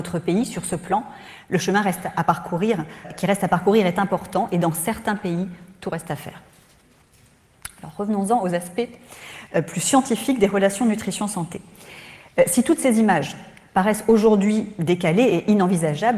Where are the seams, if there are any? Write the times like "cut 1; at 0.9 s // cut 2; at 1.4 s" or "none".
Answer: cut 1; at 3.0 s